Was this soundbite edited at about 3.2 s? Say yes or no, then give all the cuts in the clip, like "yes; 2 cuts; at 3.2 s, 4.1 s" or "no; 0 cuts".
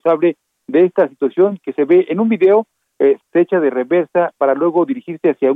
yes; 1 cut; at 3.2 s